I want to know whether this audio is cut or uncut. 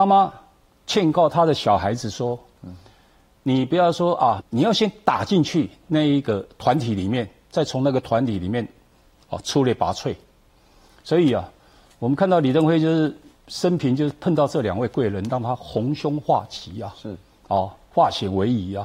cut